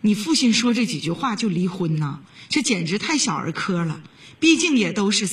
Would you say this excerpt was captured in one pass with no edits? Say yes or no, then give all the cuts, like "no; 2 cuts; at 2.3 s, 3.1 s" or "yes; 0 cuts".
yes; 0 cuts